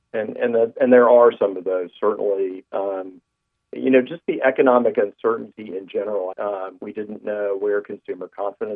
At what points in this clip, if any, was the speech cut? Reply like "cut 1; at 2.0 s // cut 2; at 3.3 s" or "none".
cut 1; at 6.3 s